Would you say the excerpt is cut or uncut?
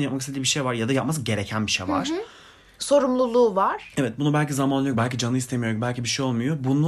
uncut